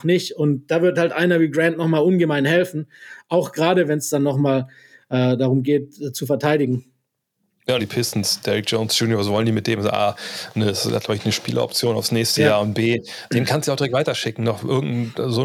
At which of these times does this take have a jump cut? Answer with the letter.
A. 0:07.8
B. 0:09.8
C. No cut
A